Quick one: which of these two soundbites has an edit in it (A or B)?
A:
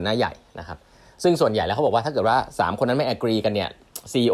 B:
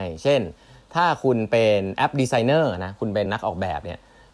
B